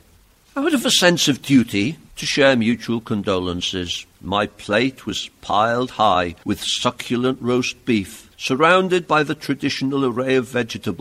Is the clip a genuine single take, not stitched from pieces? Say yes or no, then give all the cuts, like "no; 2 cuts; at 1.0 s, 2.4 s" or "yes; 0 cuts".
no; 2 cuts; at 2.1 s, 4.1 s